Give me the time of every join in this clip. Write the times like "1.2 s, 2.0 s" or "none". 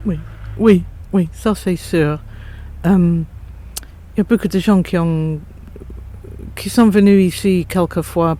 none